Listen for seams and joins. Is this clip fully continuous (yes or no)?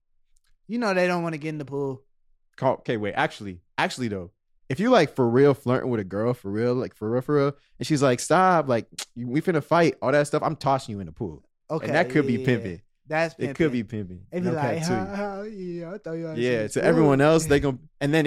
yes